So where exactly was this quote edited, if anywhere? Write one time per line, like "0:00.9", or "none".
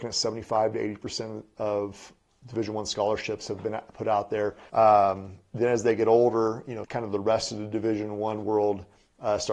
0:04.7
0:06.8